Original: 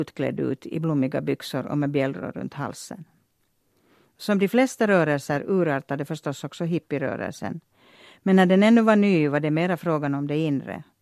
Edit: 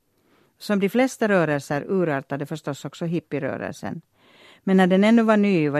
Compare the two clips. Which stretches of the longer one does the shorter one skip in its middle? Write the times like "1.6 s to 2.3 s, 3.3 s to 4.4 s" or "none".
none